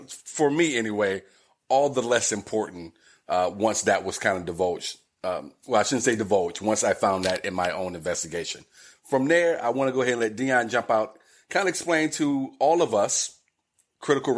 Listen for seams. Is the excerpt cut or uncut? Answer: uncut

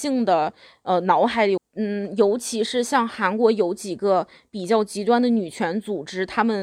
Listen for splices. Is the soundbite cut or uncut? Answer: cut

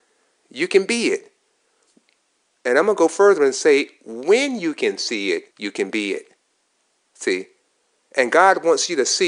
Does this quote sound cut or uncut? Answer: cut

